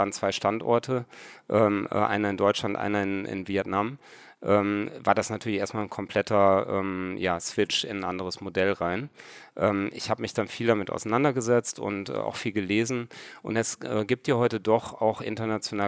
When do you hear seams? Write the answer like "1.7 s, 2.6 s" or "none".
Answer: none